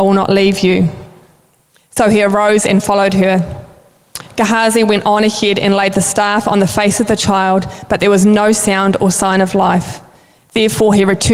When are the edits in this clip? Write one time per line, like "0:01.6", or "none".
none